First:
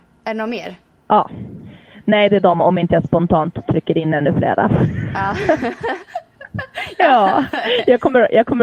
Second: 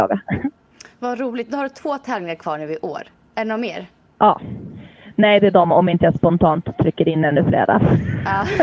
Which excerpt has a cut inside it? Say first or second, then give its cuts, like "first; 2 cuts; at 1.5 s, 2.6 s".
first; 1 cut; at 6.9 s